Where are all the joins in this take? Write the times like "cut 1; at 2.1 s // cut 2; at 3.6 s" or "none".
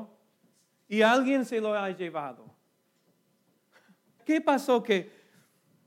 cut 1; at 4.2 s